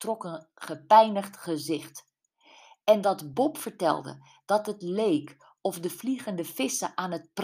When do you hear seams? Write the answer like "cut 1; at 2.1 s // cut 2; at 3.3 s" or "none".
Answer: none